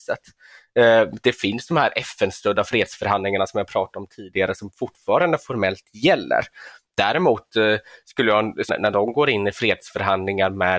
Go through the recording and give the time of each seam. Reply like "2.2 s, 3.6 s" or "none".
8.7 s